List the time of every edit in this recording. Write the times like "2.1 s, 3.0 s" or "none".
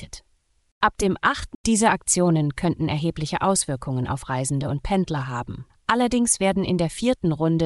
1.5 s, 5.7 s